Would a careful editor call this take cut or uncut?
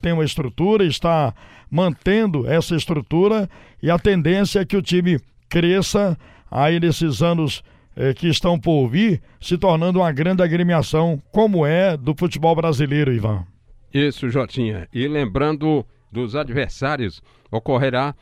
cut